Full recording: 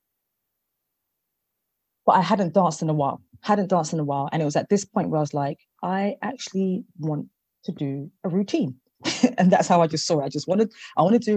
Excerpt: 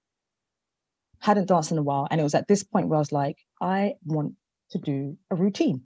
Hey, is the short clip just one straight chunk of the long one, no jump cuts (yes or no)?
no